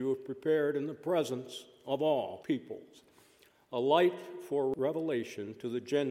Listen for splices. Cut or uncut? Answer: uncut